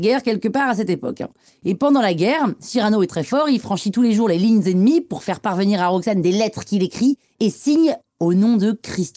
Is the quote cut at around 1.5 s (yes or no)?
no